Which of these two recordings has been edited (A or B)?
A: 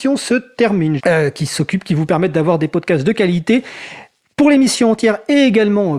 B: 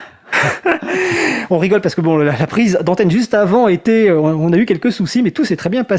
A